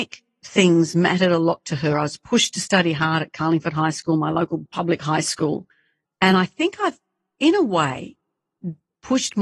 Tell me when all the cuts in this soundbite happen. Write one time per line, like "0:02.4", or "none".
0:06.0